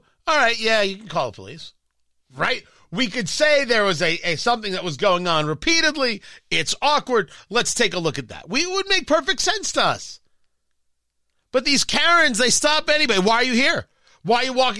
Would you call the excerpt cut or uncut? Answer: uncut